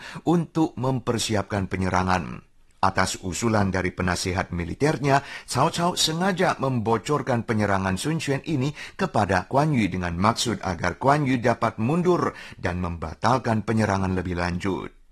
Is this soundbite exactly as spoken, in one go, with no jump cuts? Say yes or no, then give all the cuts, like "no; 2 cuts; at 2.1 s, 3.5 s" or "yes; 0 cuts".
yes; 0 cuts